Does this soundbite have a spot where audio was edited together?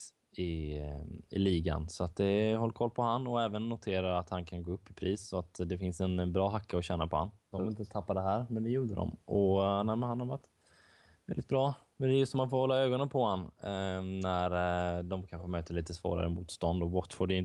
yes; 1 cut; at 7.5 s

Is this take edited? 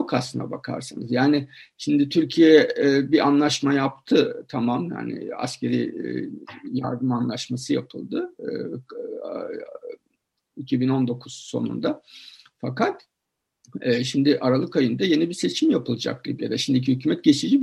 no; 0 cuts

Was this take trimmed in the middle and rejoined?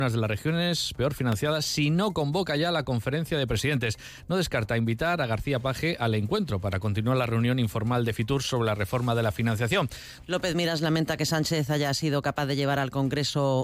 yes; 1 cut; at 10.2 s

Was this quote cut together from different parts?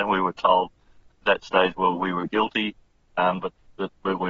yes; 1 cut; at 3.4 s

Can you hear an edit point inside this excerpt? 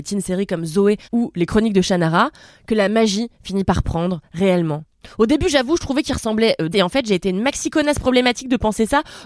yes; 2 cuts; at 1.0 s, 6.7 s

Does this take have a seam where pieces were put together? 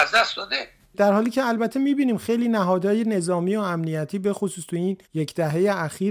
yes; 1 cut; at 5.0 s

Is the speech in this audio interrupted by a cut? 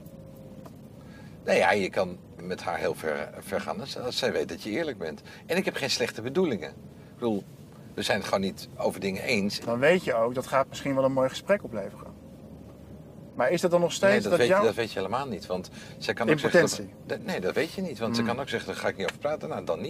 yes; 2 cuts; at 2.4 s, 9.6 s

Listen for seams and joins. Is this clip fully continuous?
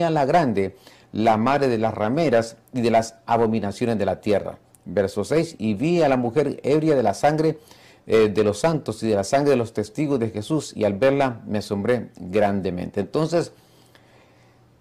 yes; 0 cuts

